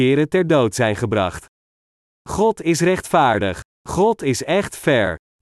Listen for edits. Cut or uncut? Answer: uncut